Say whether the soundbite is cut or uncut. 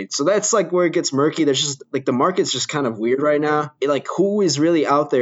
uncut